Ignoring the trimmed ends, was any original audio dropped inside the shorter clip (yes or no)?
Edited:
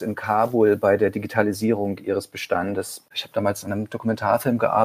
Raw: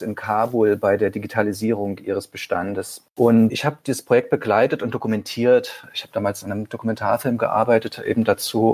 yes